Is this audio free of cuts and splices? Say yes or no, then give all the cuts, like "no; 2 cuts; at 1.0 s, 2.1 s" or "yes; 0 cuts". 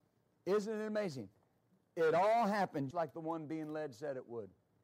no; 1 cut; at 2.9 s